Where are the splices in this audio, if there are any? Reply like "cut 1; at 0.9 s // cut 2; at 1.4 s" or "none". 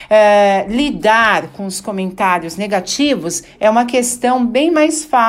none